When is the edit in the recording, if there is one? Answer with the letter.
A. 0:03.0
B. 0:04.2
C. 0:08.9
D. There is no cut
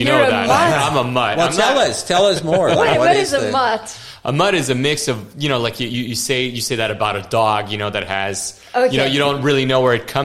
D